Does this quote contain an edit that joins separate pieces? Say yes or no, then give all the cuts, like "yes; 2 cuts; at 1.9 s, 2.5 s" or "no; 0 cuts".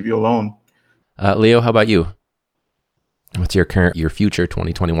yes; 2 cuts; at 1.0 s, 3.9 s